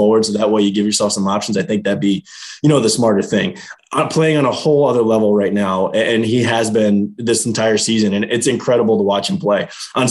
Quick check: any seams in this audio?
yes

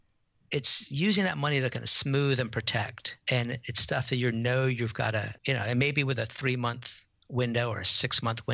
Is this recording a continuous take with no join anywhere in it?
no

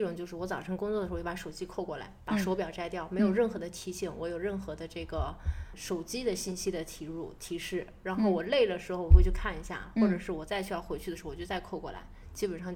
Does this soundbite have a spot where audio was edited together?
no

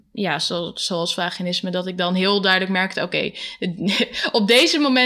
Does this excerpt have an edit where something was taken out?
no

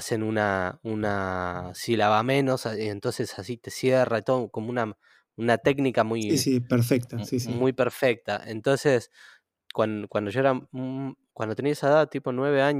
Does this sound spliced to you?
no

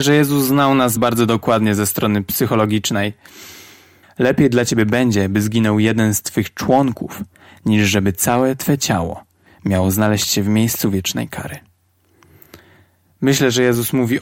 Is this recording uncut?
no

